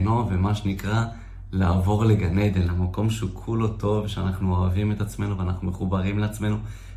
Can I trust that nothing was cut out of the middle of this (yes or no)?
yes